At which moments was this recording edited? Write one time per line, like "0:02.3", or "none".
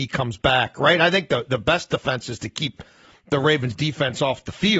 none